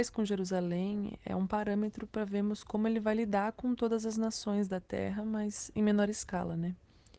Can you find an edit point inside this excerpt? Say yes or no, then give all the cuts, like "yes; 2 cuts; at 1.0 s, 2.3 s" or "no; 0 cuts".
no; 0 cuts